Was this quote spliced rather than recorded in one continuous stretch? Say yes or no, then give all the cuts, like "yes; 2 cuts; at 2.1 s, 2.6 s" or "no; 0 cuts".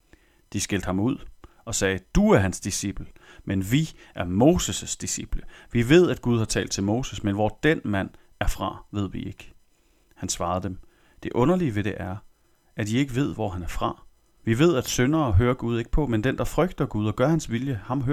yes; 1 cut; at 14.4 s